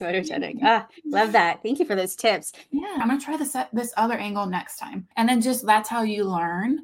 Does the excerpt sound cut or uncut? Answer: cut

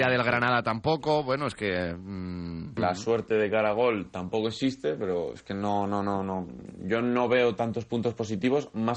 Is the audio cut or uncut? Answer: cut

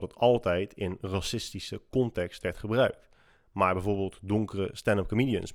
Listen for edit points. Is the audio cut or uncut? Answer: uncut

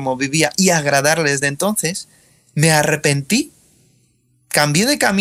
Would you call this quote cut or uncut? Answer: uncut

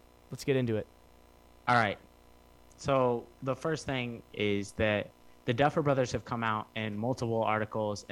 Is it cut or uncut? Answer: cut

